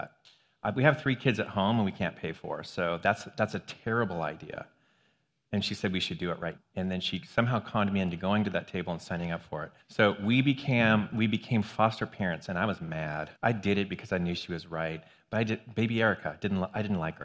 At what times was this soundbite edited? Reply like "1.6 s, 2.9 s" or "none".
6.6 s, 9.8 s, 13.4 s

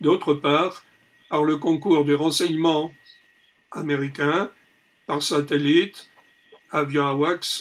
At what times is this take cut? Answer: none

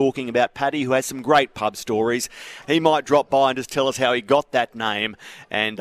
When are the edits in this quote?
2.6 s

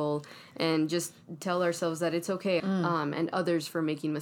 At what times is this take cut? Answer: 2.6 s

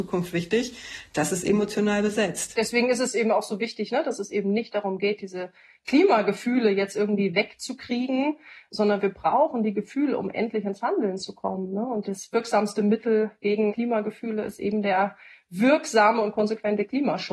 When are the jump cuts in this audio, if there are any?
none

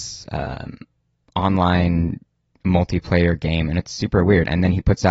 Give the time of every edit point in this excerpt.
none

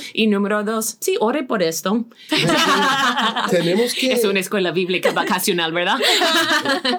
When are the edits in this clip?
2.3 s

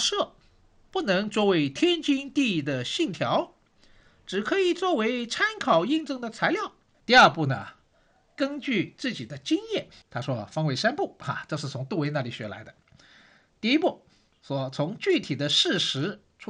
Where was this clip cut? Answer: 6.9 s, 10.0 s

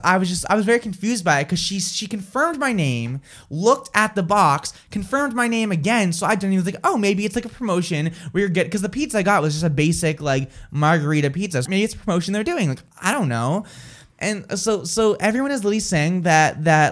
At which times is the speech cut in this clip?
11.7 s

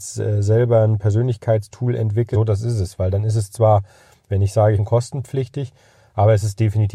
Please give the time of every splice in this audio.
2.3 s, 4.8 s

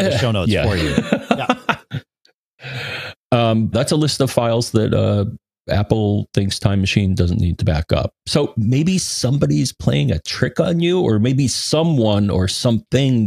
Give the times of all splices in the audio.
3.7 s

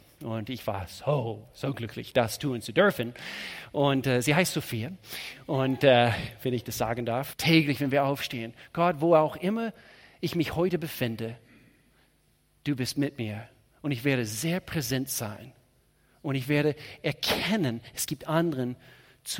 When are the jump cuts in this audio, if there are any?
7.3 s

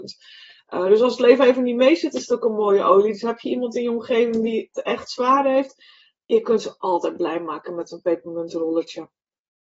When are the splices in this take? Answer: none

